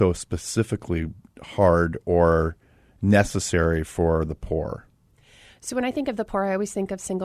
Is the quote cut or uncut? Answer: uncut